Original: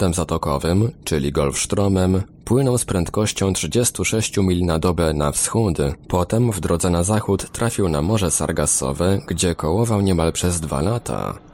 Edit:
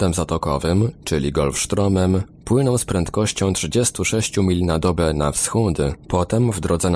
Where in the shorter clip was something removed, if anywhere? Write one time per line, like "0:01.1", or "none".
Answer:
none